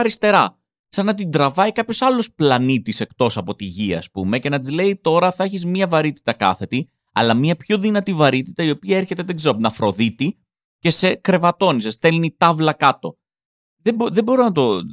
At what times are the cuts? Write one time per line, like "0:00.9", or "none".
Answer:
none